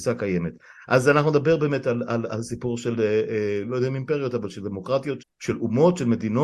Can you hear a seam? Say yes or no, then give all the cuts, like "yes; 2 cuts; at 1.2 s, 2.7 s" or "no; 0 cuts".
yes; 1 cut; at 5.2 s